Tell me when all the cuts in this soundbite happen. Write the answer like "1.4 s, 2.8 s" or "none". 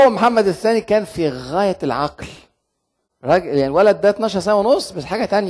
none